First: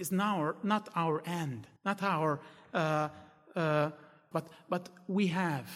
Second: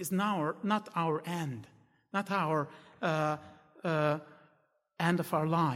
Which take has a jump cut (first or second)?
first